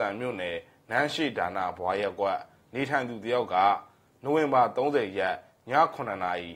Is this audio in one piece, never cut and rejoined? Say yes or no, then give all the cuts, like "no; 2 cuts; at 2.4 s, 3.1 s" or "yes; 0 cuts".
yes; 0 cuts